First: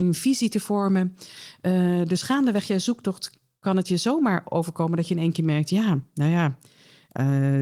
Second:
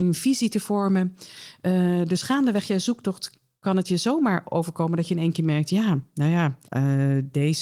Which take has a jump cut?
second; 1 cut; at 6.7 s

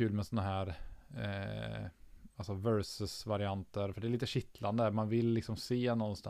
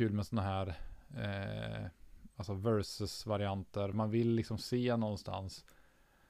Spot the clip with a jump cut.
second; 1 cut; at 3.9 s

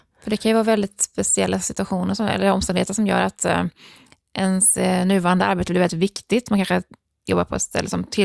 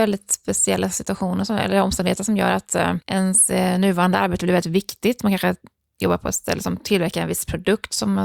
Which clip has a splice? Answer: second; 1 cut; at 3.0 s

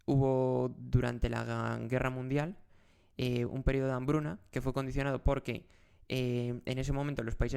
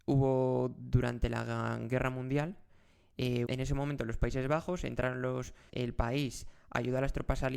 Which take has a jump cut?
second; 2 cuts; at 3.4 s, 5.7 s

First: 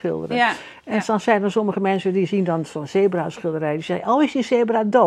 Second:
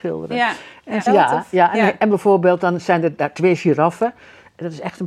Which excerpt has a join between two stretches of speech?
second; 1 cut; at 1.1 s

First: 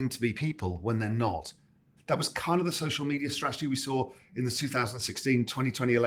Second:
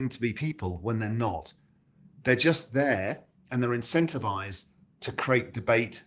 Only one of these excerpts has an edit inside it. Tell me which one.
first; 1 cut; at 2.0 s

